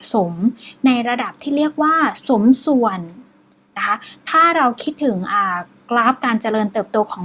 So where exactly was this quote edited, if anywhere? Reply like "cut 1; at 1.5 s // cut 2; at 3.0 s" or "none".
none